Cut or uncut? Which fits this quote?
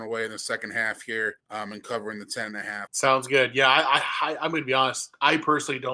cut